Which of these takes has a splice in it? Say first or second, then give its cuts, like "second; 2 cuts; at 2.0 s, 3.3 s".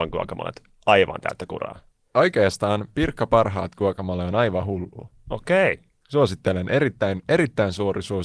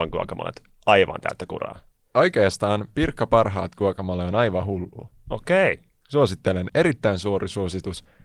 second; 1 cut; at 6.7 s